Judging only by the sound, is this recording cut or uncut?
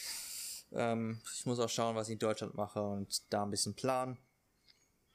uncut